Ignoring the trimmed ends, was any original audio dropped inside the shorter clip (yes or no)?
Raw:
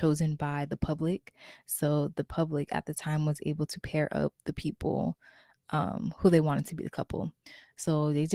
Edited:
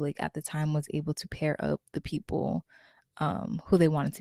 no